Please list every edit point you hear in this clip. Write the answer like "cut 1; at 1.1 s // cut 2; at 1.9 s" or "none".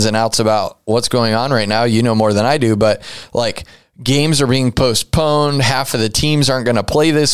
none